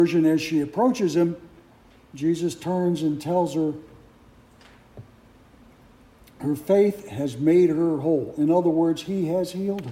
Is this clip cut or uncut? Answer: uncut